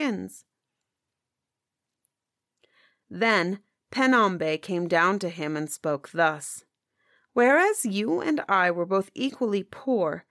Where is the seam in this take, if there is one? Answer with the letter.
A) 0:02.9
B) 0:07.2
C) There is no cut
C